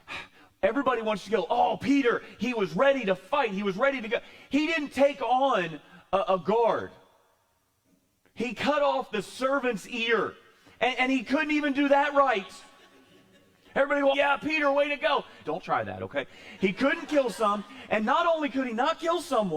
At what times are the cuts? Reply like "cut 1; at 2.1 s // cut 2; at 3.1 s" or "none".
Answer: cut 1; at 14.1 s // cut 2; at 15.4 s